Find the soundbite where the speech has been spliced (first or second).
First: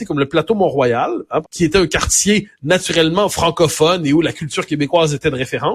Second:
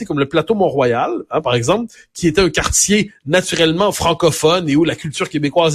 first